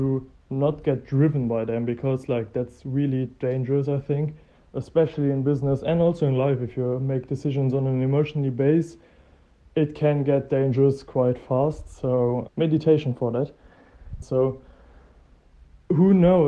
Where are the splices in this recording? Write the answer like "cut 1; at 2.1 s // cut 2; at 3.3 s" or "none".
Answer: cut 1; at 12.5 s // cut 2; at 14.2 s